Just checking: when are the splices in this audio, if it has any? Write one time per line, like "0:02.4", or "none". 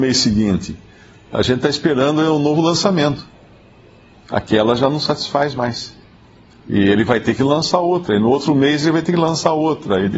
none